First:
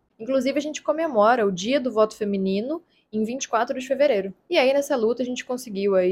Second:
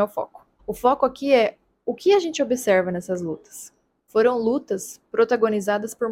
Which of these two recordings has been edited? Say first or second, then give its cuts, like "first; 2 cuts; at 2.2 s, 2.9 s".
first; 1 cut; at 4.5 s